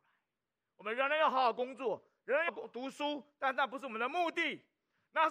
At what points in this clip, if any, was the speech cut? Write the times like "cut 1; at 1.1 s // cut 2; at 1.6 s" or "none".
cut 1; at 2.5 s